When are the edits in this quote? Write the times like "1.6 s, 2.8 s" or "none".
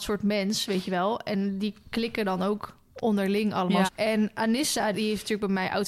3.9 s, 4.9 s